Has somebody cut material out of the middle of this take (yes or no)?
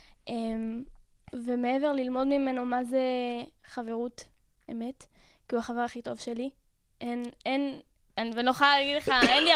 no